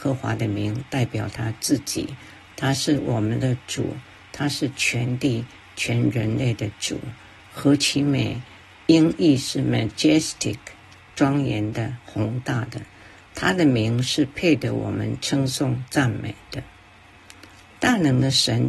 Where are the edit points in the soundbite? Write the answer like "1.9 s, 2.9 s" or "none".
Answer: 12.0 s